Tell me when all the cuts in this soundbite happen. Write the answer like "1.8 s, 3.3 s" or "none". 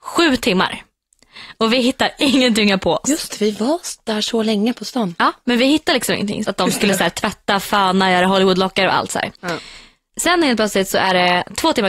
6.4 s